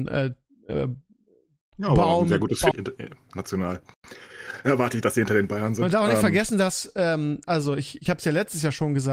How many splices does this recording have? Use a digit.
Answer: 1